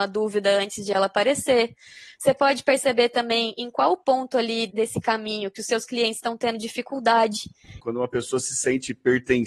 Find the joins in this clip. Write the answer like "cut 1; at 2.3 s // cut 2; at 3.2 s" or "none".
cut 1; at 4.7 s // cut 2; at 7.8 s